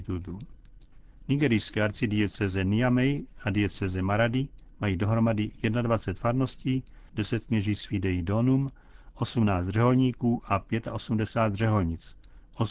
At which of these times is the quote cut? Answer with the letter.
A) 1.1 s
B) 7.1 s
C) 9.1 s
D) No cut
B